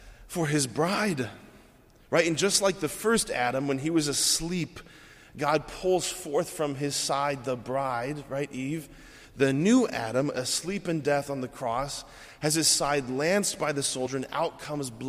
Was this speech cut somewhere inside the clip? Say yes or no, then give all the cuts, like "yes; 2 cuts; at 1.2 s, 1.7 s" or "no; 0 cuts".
no; 0 cuts